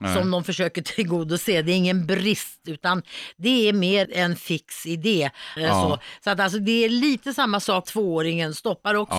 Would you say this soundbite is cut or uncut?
cut